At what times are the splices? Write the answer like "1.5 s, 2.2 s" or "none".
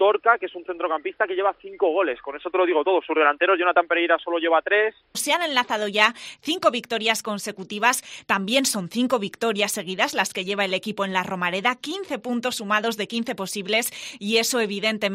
5.1 s